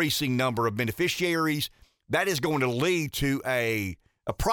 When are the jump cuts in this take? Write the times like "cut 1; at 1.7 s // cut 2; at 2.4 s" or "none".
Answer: none